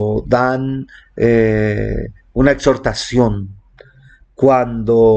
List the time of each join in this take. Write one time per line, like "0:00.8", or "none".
none

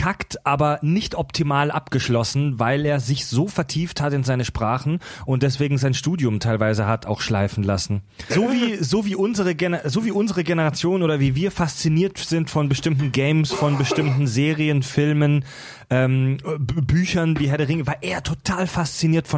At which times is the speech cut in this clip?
0:08.3

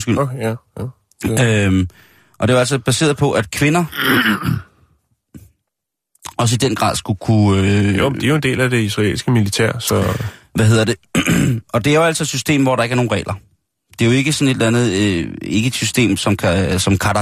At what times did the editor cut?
none

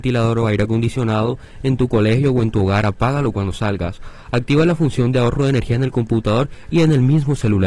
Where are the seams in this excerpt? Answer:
0:04.2

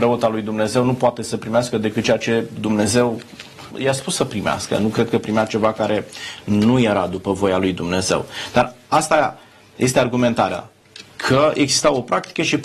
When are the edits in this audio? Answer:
0:03.7

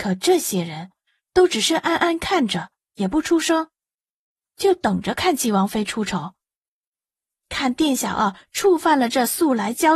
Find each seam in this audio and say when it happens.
none

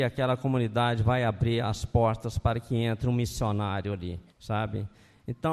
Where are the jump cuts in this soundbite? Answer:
0:04.3

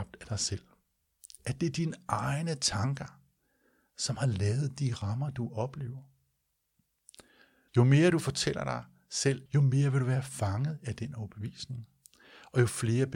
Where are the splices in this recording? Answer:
0:07.7
0:09.5

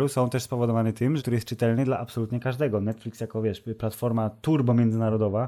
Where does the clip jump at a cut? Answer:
0:01.2

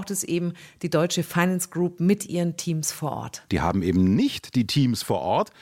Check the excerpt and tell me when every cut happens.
0:03.5

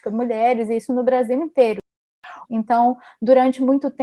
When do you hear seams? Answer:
0:02.5

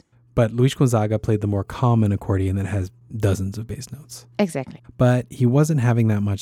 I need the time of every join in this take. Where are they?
0:04.8

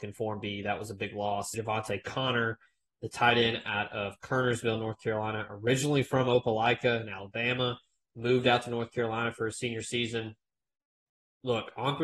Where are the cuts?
0:01.5

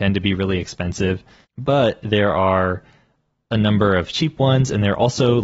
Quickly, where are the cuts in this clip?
0:01.4

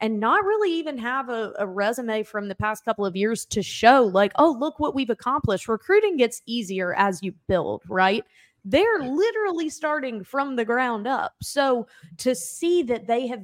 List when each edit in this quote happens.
none

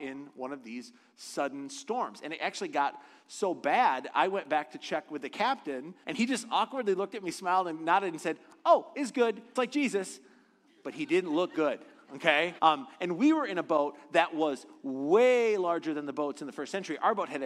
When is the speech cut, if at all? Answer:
0:06.0
0:09.6
0:12.6

